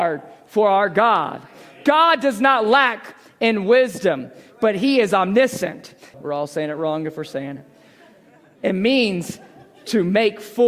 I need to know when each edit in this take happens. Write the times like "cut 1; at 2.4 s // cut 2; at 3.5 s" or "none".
cut 1; at 6.1 s